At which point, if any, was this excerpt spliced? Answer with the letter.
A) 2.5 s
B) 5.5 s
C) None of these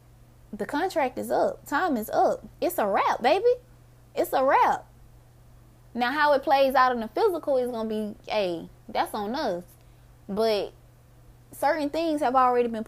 A